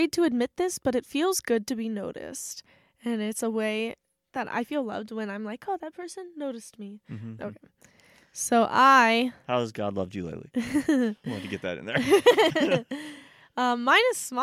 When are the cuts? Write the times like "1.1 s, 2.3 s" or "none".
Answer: 7.4 s

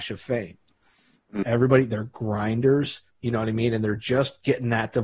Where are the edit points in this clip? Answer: 1.4 s, 3.1 s

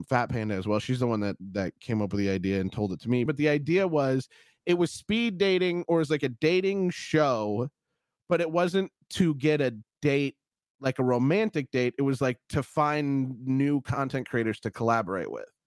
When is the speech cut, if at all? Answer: 3.3 s

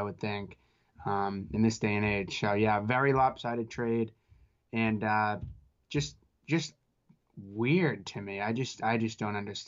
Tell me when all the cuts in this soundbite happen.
none

